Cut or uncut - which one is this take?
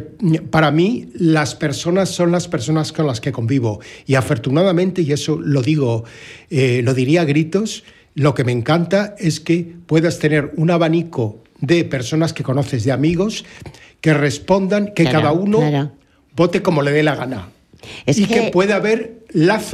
uncut